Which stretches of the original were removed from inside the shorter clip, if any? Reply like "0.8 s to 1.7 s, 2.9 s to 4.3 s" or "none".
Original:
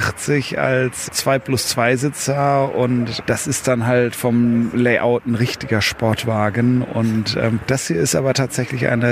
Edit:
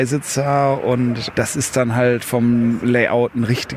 none